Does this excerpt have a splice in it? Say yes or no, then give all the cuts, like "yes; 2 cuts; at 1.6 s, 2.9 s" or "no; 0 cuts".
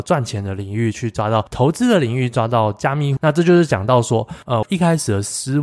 yes; 2 cuts; at 3.2 s, 4.6 s